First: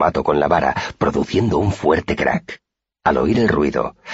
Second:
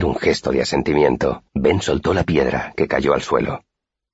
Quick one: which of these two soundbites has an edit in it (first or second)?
second